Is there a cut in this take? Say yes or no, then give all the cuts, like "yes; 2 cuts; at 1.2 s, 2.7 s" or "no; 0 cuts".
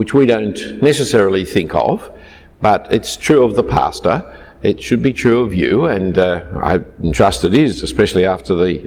no; 0 cuts